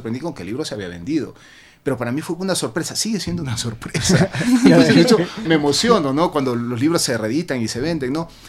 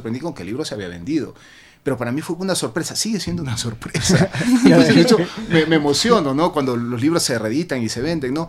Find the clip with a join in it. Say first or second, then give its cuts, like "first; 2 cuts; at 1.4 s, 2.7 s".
first; 1 cut; at 5.4 s